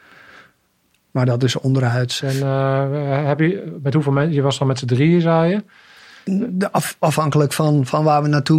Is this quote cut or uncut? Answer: cut